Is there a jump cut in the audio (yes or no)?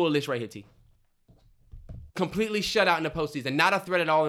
yes